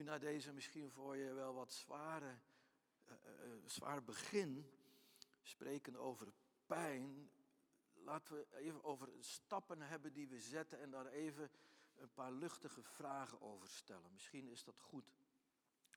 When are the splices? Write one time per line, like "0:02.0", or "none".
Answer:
none